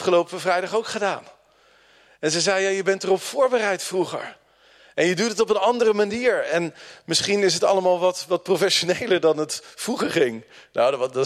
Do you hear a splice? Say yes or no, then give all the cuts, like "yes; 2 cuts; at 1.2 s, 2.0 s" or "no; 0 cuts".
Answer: no; 0 cuts